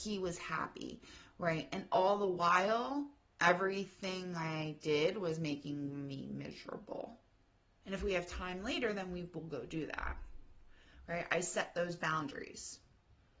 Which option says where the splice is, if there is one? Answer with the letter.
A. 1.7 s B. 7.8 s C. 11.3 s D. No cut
B